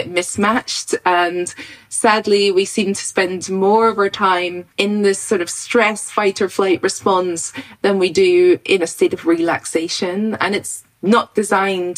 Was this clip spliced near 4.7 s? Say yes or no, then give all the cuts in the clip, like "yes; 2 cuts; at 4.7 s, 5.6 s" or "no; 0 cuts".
yes; 1 cut; at 4.7 s